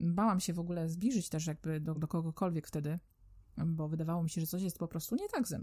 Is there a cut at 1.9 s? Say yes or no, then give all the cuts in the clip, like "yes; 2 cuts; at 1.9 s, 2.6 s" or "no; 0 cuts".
no; 0 cuts